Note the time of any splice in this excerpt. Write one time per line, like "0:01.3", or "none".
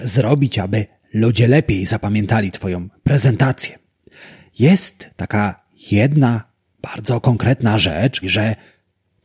0:08.2